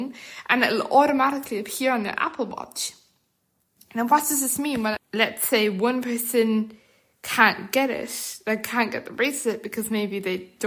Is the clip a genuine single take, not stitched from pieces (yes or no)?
no